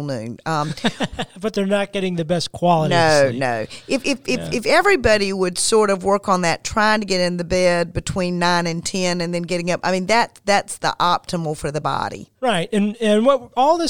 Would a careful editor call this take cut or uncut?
uncut